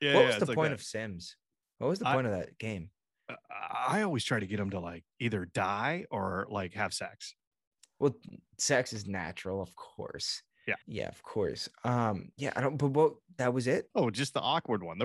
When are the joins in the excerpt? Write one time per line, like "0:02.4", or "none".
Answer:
0:10.8
0:13.9